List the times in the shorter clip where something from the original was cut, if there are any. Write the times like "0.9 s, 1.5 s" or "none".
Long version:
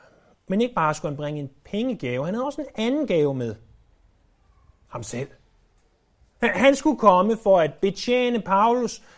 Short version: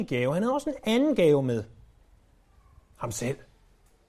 none